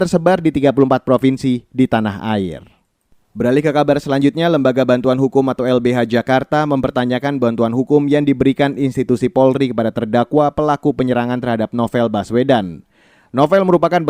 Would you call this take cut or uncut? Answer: uncut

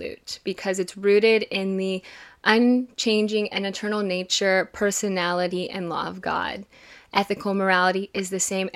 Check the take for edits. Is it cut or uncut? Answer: uncut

